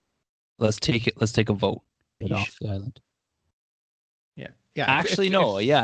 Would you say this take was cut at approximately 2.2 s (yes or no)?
yes